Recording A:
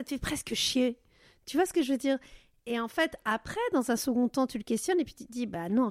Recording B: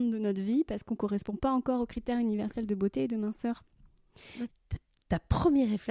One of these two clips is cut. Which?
B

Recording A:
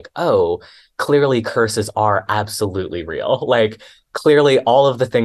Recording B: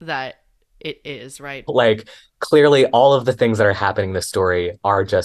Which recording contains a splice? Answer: B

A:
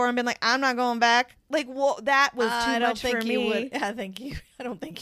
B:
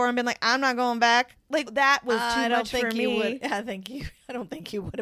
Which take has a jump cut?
B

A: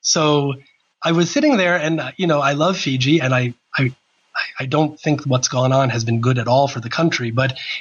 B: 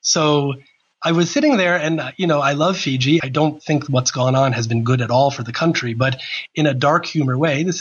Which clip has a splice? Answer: B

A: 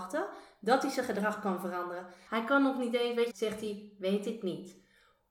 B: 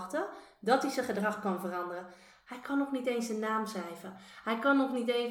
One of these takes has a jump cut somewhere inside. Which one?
A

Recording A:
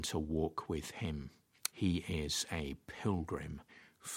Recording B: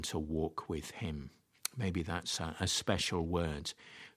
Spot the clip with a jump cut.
A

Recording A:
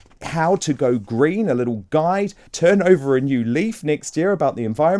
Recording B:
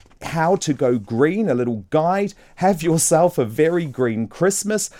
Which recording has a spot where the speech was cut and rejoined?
A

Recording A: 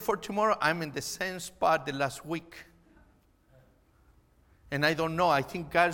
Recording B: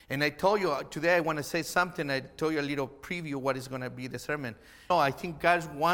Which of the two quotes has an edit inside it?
B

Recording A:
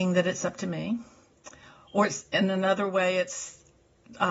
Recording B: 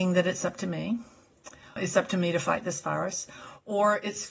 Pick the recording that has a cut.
B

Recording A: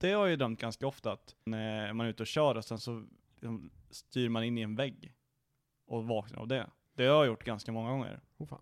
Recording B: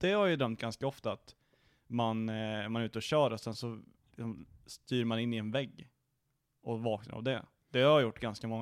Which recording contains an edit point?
A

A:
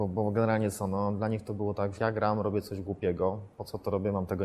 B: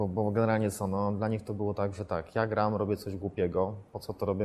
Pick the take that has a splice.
A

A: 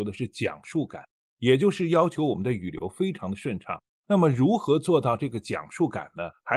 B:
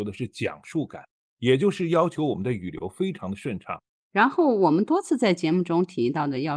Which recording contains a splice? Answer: B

